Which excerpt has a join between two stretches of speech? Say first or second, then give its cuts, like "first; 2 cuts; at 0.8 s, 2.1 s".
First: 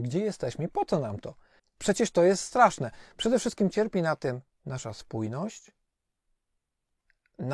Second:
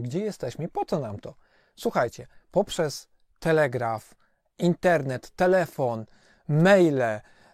first; 1 cut; at 1.6 s